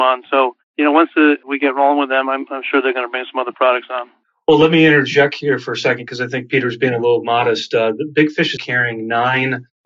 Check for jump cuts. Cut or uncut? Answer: cut